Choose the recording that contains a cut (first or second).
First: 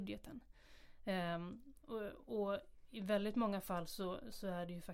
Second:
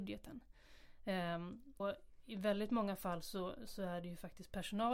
second